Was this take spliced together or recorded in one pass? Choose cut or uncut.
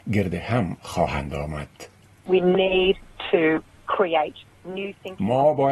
uncut